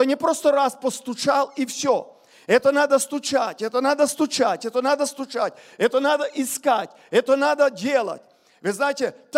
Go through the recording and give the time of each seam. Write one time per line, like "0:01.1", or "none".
none